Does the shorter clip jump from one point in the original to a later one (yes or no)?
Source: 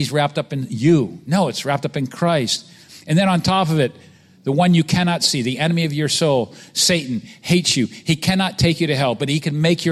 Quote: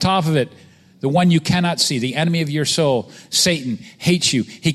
no